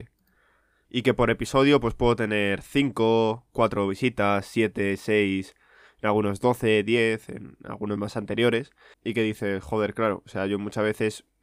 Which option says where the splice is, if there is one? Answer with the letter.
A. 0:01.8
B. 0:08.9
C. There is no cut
B